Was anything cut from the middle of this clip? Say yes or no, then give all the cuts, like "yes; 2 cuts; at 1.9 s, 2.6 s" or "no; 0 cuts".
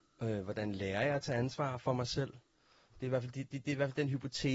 yes; 1 cut; at 2.9 s